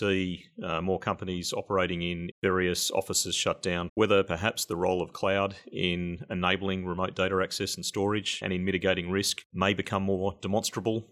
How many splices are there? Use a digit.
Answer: 3